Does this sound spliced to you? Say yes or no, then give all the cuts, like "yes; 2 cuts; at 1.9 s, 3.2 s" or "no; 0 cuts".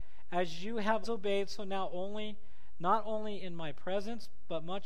yes; 1 cut; at 1.0 s